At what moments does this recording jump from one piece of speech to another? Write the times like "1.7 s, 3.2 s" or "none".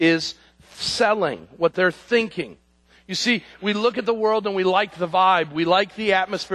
3.0 s